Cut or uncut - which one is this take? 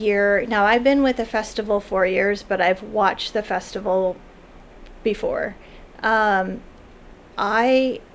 uncut